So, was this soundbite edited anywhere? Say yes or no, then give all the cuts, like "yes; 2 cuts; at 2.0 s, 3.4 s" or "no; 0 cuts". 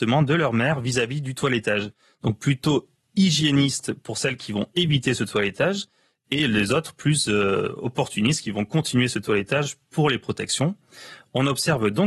no; 0 cuts